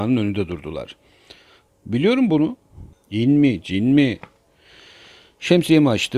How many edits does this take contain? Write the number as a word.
two